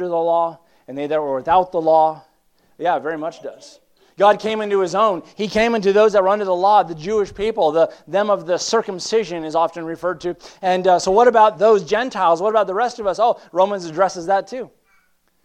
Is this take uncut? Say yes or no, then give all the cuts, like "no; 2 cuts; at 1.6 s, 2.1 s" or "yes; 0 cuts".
yes; 0 cuts